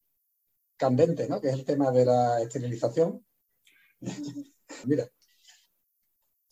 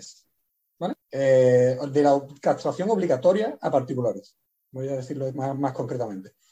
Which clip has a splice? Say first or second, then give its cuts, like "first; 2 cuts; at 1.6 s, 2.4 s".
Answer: first; 1 cut; at 4.8 s